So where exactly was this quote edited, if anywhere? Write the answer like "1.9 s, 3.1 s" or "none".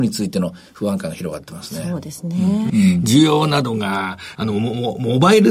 2.7 s, 4.3 s